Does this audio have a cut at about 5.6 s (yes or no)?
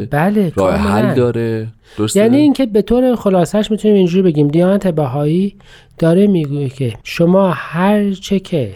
no